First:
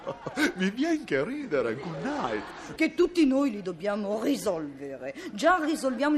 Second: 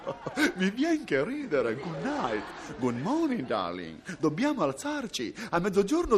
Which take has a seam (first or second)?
first